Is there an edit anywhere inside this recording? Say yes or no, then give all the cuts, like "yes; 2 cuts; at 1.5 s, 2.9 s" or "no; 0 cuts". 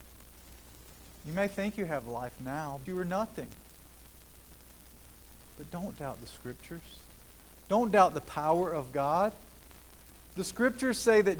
yes; 2 cuts; at 2.9 s, 5.5 s